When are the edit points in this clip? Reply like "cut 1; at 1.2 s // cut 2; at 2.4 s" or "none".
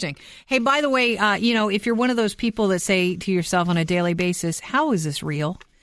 none